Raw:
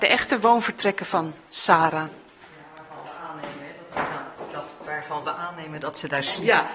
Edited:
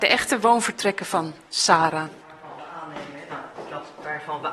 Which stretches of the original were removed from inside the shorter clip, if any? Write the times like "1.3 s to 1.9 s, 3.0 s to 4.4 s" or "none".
2.2 s to 2.7 s, 3.8 s to 4.1 s